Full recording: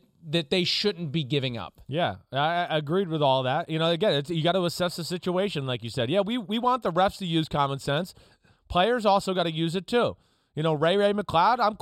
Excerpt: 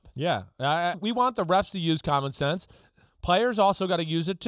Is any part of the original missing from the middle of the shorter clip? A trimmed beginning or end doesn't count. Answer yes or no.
yes